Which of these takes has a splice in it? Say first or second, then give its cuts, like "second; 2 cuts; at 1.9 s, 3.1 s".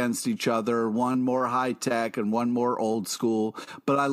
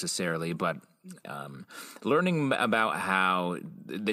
second; 1 cut; at 1.2 s